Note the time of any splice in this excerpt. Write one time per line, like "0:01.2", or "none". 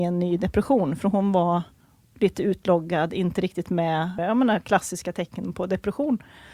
0:04.2